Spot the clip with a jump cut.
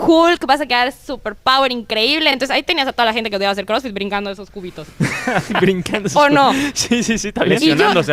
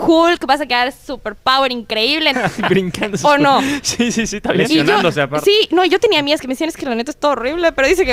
second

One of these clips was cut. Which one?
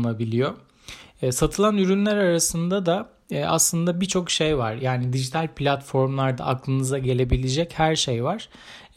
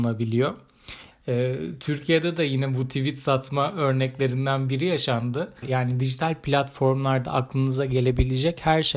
second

